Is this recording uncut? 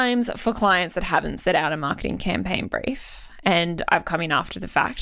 yes; 0 cuts

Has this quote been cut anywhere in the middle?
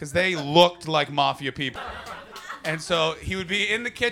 yes; 1 cut; at 1.8 s

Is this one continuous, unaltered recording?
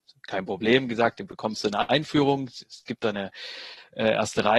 yes; 0 cuts

